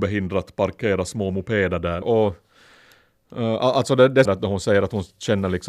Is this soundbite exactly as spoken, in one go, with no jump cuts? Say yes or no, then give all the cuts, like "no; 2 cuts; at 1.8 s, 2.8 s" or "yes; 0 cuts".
no; 2 cuts; at 2.0 s, 4.3 s